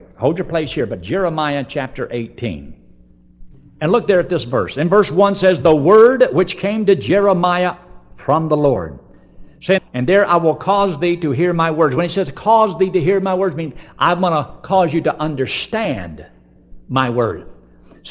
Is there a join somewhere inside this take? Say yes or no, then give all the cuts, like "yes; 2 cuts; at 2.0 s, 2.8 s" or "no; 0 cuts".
yes; 1 cut; at 9.8 s